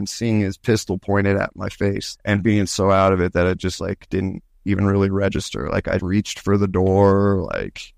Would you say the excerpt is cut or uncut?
cut